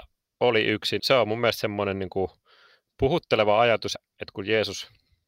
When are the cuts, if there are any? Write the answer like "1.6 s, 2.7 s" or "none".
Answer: 1.0 s, 3.9 s